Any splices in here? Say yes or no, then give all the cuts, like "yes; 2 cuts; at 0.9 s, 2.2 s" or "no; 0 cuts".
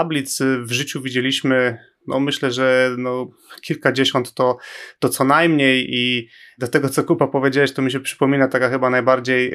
no; 0 cuts